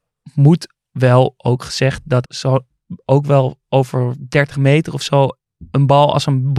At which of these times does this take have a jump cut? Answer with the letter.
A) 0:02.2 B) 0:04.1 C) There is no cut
A